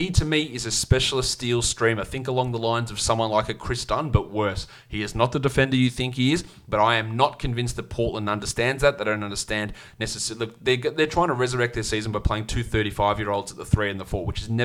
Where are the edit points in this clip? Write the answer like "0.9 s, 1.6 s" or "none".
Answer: none